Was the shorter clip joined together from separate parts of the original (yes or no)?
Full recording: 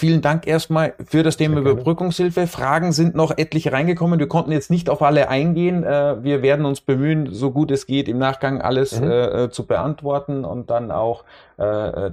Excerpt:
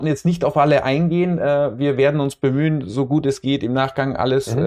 no